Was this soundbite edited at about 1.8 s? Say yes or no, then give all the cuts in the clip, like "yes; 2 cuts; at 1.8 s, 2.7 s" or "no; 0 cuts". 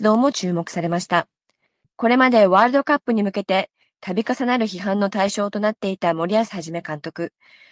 yes; 1 cut; at 1.8 s